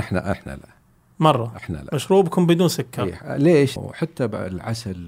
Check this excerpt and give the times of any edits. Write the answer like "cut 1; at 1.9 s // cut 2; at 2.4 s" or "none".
cut 1; at 3.8 s